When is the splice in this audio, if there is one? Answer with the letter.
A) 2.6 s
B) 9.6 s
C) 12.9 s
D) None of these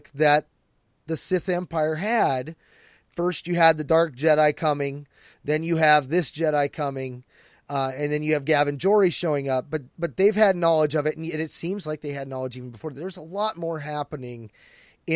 D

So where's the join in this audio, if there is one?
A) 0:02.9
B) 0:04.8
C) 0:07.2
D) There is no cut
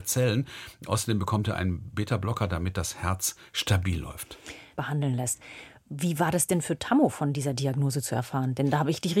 B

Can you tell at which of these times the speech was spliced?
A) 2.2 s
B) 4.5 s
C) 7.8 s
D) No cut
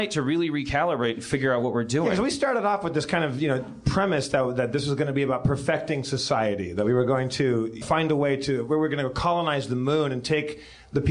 C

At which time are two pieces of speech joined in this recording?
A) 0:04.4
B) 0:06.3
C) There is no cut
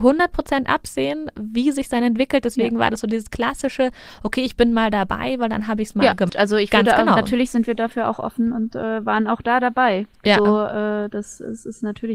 B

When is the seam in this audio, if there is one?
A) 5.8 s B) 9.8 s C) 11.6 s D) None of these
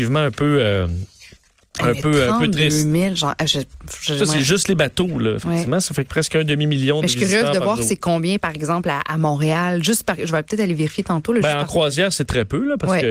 D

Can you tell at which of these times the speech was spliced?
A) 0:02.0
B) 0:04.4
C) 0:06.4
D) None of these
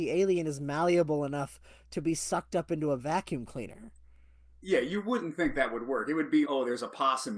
C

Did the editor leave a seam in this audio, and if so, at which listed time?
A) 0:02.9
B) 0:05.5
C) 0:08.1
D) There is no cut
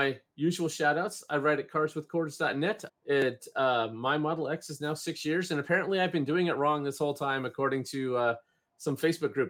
A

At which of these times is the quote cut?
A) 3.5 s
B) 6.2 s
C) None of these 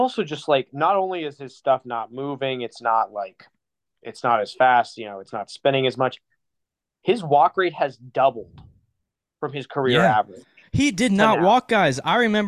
C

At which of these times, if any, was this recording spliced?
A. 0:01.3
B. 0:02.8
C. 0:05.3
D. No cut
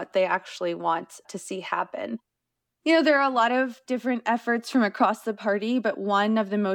B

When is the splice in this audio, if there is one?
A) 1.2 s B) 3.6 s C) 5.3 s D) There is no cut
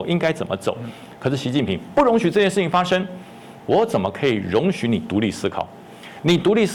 B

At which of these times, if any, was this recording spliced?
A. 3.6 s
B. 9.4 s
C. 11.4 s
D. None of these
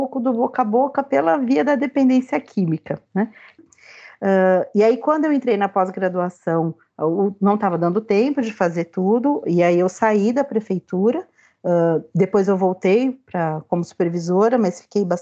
A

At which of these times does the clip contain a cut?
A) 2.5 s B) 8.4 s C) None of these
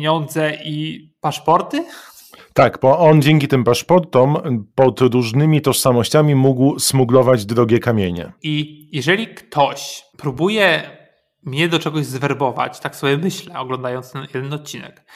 B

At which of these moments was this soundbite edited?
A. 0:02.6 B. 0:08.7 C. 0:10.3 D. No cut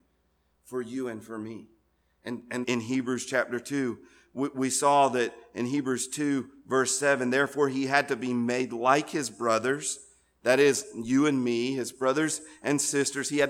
A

